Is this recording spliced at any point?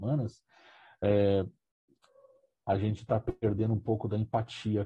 yes; 1 cut; at 2.6 s

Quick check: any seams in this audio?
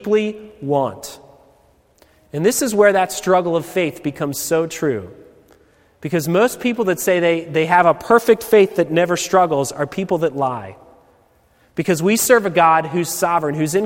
no; 0 cuts

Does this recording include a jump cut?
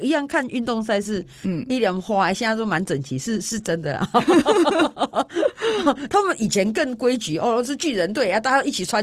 no; 0 cuts

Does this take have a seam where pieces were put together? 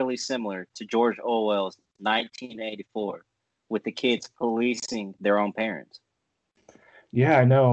no; 0 cuts

